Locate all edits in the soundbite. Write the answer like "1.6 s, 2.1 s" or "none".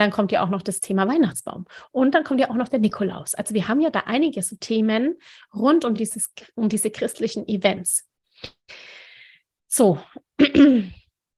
none